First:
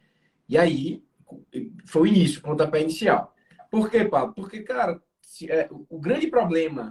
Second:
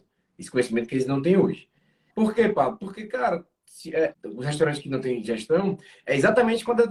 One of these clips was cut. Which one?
second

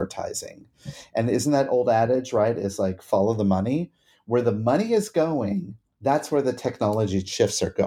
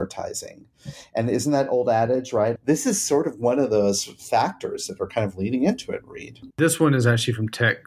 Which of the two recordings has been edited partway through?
second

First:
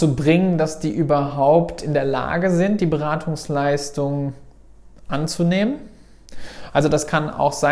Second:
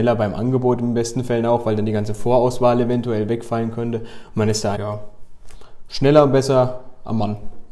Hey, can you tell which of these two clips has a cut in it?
second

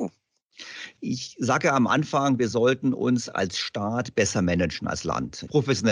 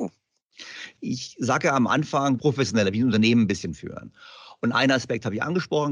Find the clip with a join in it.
second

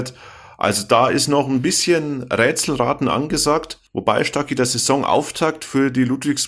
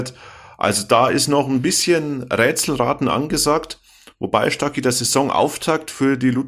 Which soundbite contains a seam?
first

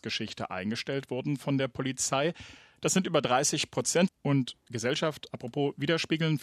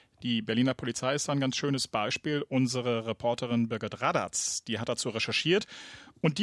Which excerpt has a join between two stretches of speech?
first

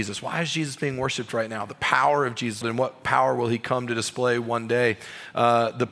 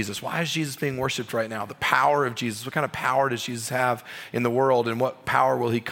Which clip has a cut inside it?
first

